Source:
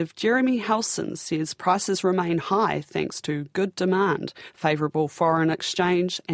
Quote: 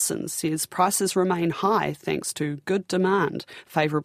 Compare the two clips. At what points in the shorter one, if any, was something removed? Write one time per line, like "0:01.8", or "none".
none